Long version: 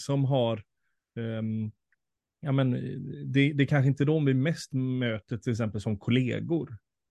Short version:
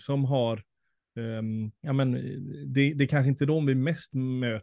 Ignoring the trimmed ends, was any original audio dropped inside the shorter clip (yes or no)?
yes